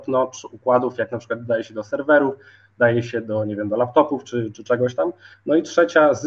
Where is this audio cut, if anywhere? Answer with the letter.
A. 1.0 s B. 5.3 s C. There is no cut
B